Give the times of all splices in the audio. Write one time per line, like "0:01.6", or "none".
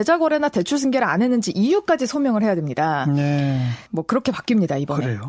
0:03.9